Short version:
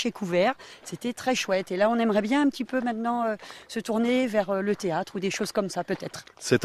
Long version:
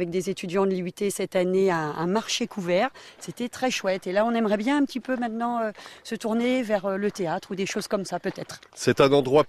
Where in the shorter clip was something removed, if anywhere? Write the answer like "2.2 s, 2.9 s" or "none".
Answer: none